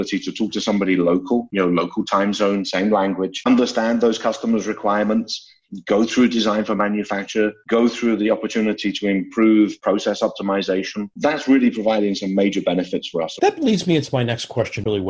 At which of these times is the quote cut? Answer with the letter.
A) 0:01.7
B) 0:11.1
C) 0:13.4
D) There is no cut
C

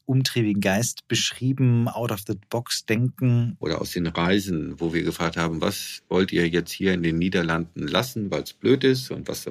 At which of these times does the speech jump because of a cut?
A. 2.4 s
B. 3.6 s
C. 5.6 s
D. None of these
B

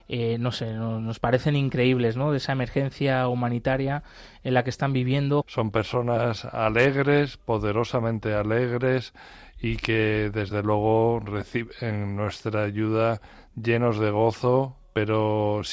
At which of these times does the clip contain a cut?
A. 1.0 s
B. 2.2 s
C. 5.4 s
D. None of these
C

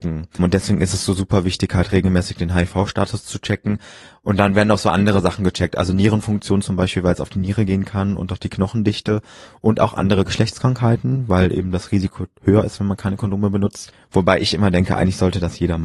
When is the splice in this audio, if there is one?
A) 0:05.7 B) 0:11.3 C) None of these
C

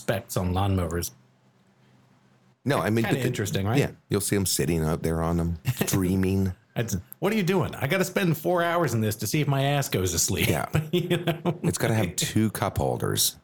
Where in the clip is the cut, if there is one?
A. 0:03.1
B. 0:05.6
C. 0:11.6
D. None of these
B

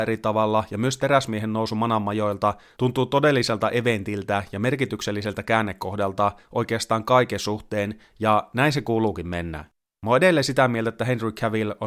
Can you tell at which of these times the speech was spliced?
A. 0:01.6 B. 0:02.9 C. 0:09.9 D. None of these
D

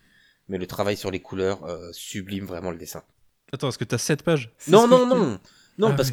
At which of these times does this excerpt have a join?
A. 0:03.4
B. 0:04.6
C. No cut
B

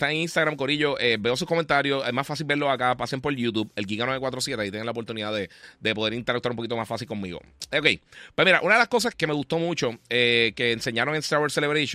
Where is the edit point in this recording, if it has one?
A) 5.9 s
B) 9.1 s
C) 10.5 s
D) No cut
B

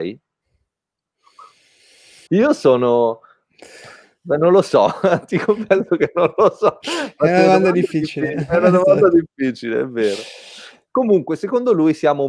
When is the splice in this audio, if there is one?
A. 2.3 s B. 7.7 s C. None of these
A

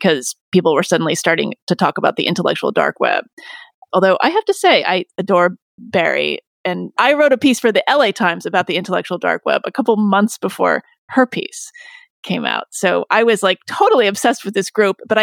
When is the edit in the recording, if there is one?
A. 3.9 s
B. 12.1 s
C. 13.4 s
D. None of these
A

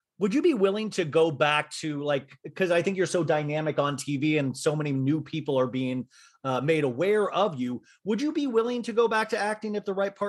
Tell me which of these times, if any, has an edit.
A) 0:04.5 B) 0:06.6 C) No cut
C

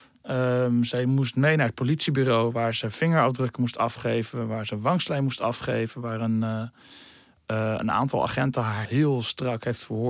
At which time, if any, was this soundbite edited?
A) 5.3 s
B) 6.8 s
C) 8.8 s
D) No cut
C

